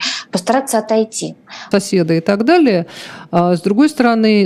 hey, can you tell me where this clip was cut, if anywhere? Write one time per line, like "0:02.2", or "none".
0:01.7